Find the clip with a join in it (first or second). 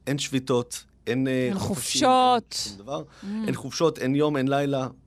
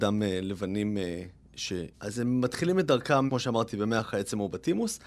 second